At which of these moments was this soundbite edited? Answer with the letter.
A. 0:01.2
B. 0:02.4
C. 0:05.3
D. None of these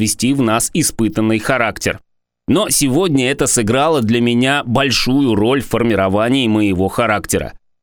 B